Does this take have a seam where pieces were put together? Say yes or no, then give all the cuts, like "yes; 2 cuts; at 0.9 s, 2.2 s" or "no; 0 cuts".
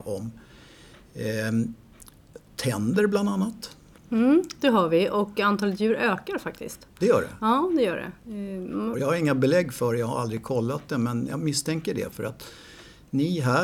yes; 2 cuts; at 4.0 s, 8.9 s